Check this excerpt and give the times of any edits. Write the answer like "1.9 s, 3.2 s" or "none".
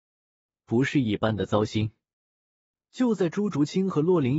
none

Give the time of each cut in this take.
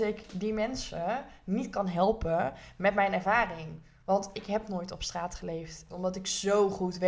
5.9 s

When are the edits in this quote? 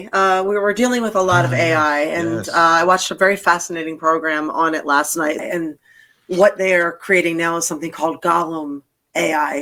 5.4 s

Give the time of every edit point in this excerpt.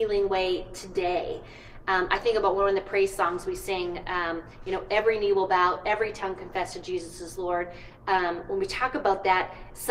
none

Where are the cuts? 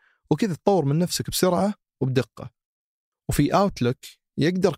none

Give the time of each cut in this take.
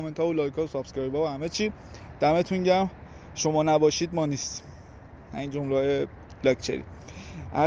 none

